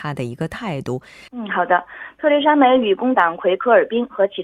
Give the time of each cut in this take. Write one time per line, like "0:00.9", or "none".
0:01.3
0:03.1